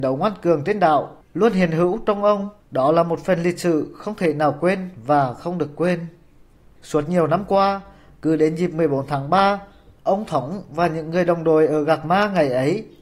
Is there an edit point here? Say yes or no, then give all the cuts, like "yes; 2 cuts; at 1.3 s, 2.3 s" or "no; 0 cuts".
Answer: yes; 1 cut; at 2.6 s